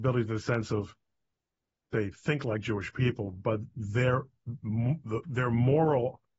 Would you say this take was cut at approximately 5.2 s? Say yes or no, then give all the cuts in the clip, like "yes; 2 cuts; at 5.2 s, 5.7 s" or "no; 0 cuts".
yes; 1 cut; at 5.2 s